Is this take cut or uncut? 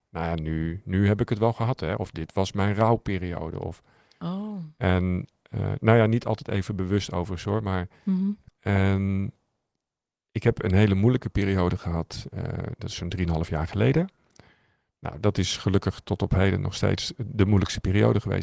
cut